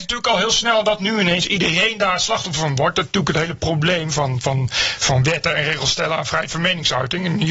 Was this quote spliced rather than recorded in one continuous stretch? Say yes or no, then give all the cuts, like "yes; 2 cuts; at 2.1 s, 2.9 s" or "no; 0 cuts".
no; 0 cuts